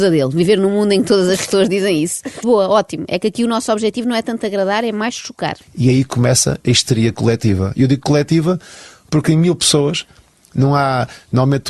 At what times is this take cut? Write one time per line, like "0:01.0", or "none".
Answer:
0:02.4